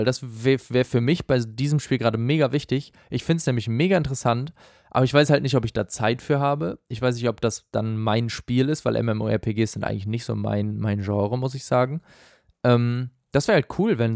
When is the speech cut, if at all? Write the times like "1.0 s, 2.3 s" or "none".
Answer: none